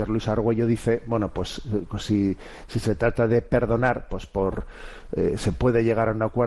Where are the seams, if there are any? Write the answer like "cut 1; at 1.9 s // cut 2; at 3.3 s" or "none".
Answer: none